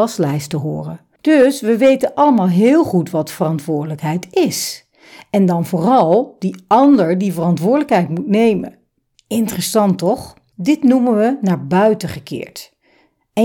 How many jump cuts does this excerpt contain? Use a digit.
1